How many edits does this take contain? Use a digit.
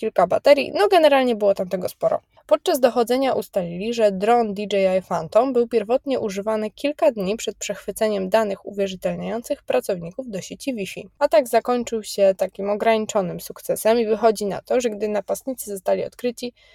1